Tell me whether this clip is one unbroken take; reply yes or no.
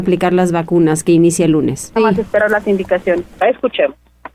no